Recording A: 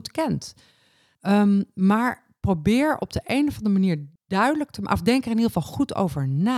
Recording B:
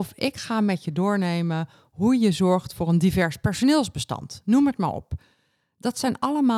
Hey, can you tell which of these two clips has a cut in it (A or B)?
A